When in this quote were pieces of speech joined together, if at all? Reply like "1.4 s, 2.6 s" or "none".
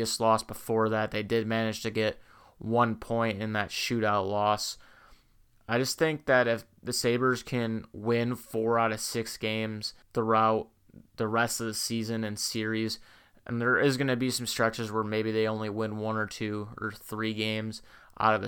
10.0 s